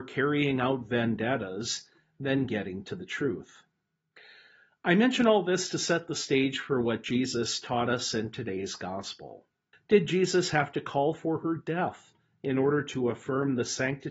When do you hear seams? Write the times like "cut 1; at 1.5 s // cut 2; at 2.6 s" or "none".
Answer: cut 1; at 9.7 s